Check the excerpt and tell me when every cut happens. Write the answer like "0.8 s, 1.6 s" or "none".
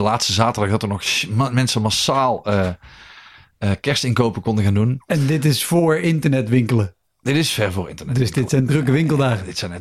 none